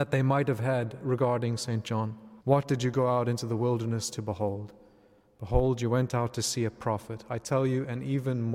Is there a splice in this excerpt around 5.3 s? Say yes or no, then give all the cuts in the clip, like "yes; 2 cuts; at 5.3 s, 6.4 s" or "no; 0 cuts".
no; 1 cut; at 2.4 s